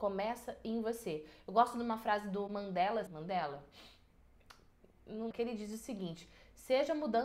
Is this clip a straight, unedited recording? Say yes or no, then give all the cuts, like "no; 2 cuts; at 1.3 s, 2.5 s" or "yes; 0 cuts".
no; 2 cuts; at 3.1 s, 5.3 s